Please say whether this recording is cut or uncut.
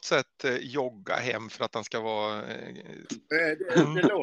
cut